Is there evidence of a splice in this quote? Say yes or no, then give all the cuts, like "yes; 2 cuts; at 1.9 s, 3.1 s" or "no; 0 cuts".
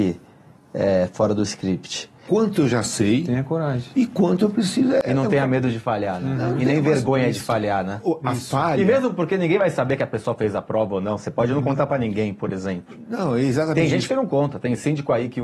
yes; 1 cut; at 2.3 s